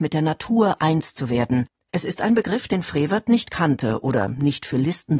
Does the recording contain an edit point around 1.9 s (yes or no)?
yes